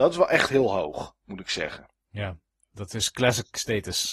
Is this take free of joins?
yes; 0 cuts

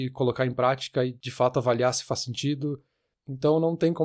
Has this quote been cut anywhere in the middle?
no; 0 cuts

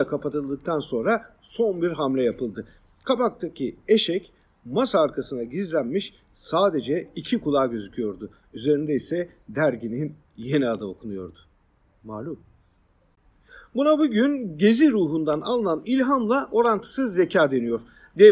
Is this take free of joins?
yes; 0 cuts

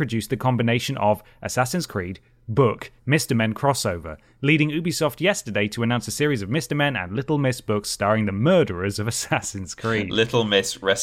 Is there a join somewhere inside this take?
yes; 1 cut; at 3.0 s

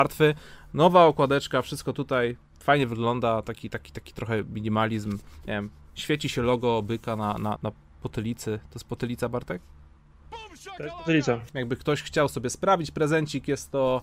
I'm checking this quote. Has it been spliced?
yes; 2 cuts; at 7.6 s, 11.5 s

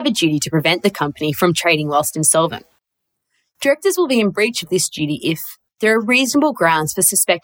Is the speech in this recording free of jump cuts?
no; 1 cut; at 5.7 s

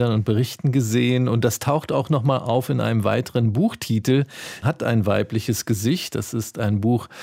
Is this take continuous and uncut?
no; 1 cut; at 4.6 s

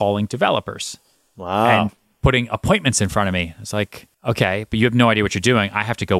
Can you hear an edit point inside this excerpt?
yes; 1 cut; at 4.1 s

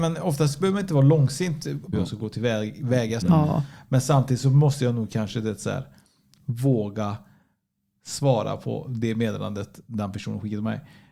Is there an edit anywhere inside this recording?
yes; 2 cuts; at 1.9 s, 3.2 s

